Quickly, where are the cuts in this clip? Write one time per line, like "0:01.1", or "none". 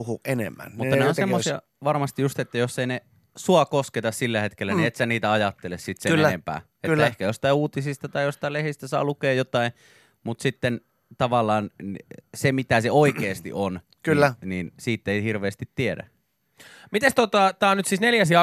none